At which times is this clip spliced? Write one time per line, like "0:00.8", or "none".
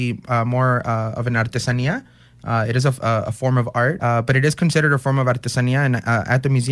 0:04.0